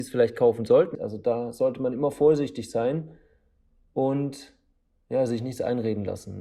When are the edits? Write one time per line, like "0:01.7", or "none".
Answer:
0:00.9